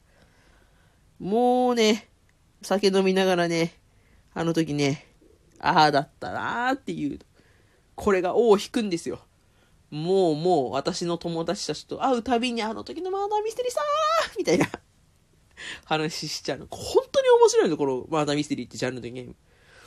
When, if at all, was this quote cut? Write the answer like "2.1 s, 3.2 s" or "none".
none